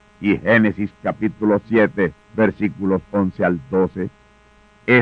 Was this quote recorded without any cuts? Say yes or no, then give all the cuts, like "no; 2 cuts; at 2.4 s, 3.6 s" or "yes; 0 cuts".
yes; 0 cuts